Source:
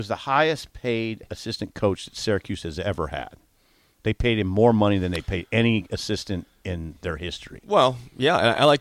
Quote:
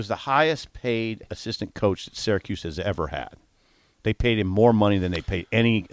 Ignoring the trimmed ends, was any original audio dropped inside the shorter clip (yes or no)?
no